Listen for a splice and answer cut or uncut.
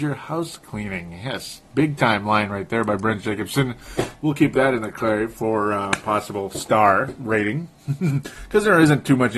uncut